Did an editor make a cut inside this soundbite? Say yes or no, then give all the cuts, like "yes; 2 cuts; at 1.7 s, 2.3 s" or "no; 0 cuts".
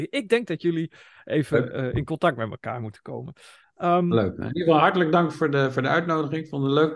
no; 0 cuts